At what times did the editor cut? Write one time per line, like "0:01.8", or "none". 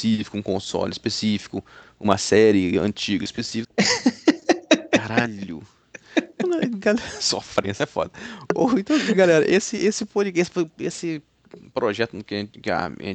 0:03.6